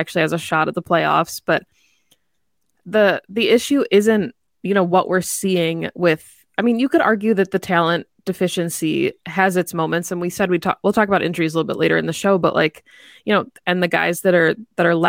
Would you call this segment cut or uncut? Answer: cut